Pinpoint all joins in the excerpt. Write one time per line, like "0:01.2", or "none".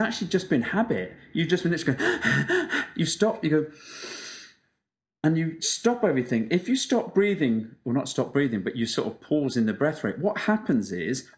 none